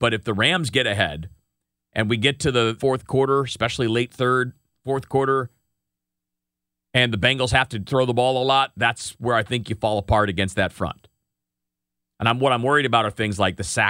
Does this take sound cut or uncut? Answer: cut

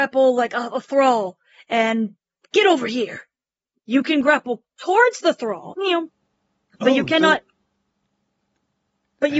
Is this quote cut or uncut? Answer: cut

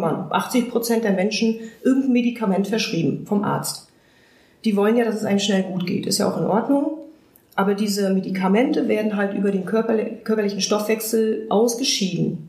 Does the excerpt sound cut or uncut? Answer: uncut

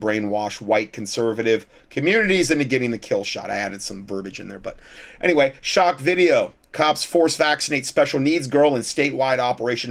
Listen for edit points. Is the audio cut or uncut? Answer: uncut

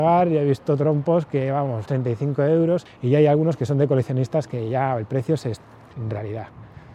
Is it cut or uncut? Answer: cut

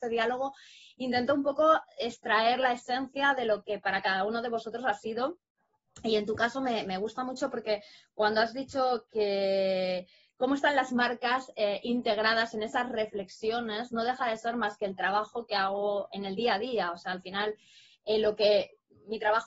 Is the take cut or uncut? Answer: uncut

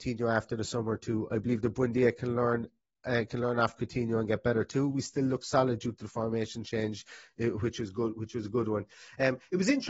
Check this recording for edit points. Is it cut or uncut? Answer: uncut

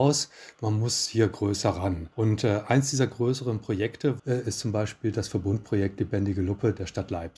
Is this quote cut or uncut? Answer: cut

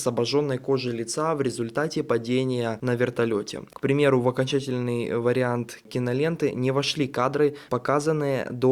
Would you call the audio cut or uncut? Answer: cut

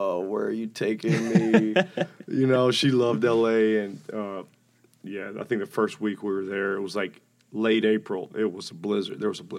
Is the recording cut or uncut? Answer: uncut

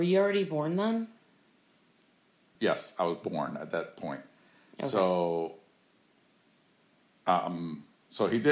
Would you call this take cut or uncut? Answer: cut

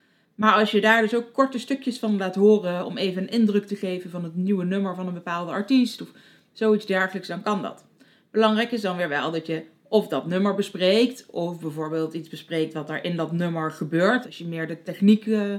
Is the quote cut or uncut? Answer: cut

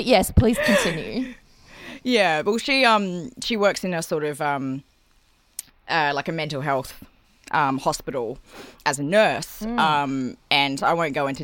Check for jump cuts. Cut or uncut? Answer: uncut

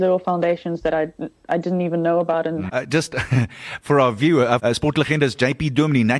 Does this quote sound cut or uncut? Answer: cut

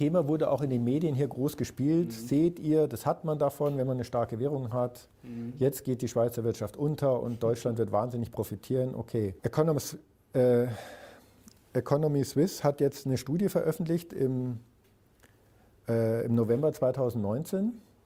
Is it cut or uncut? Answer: cut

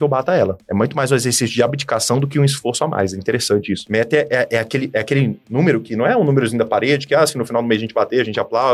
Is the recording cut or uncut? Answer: cut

